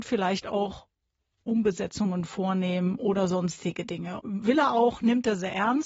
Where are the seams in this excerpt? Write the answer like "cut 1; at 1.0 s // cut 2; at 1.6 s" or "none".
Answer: cut 1; at 4.2 s